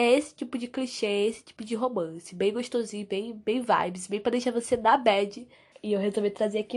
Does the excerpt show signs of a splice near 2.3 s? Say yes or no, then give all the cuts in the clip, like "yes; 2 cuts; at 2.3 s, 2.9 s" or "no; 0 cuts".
no; 1 cut; at 5.7 s